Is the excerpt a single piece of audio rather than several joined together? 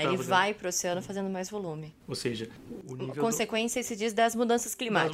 no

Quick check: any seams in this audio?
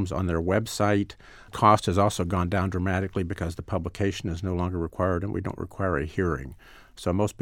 no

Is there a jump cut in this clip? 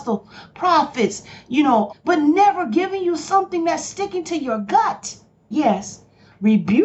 yes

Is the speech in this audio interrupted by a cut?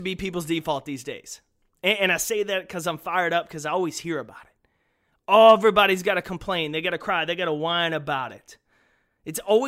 no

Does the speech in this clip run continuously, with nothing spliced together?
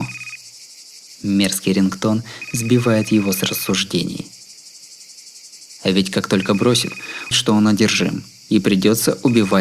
no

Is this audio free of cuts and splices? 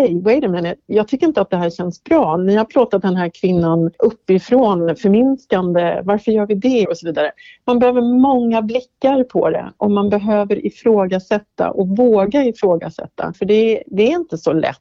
no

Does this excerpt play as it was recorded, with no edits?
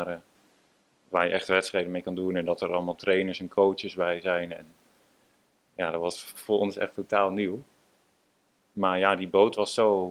yes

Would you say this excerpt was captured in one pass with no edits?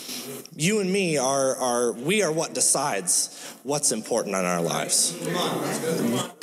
yes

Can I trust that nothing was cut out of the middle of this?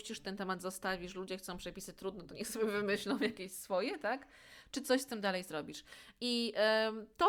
yes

